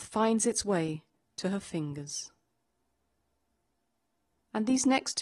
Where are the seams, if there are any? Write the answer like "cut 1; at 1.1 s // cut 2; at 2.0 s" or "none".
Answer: none